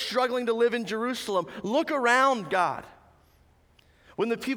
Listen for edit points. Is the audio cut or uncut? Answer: uncut